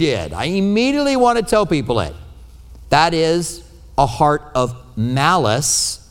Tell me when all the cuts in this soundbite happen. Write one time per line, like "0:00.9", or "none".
0:02.8